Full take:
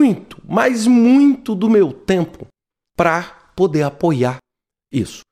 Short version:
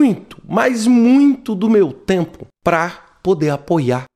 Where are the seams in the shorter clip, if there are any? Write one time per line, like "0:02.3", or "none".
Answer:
0:02.6